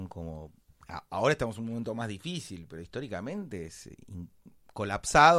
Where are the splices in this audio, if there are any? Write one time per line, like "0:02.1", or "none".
none